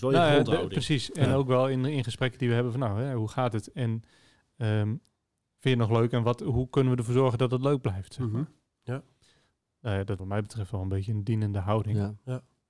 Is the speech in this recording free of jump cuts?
no; 1 cut; at 10.2 s

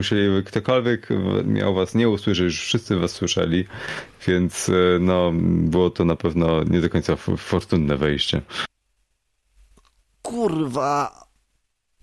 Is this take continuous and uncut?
yes; 0 cuts

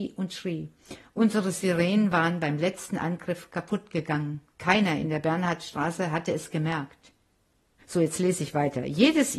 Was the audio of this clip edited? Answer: yes; 2 cuts; at 4.5 s, 7.8 s

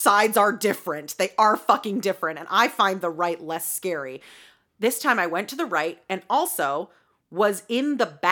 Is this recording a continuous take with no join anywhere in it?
yes; 0 cuts

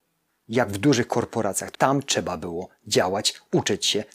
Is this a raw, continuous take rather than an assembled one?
no; 1 cut; at 1.7 s

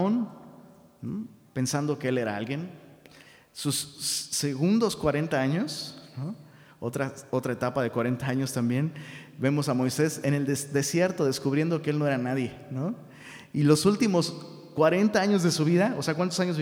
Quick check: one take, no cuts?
yes; 0 cuts

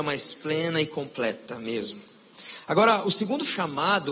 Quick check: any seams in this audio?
no; 0 cuts

